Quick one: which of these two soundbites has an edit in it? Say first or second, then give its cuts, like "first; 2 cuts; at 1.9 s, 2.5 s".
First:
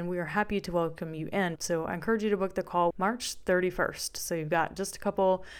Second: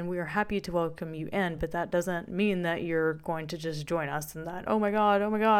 first; 2 cuts; at 1.6 s, 2.9 s